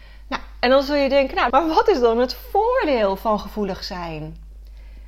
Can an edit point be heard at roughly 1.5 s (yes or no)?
yes